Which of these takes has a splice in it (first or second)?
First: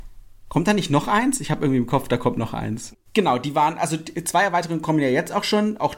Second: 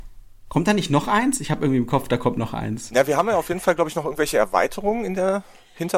first